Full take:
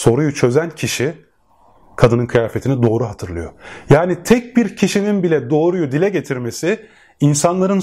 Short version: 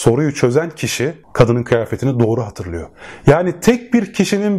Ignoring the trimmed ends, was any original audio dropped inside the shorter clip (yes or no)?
yes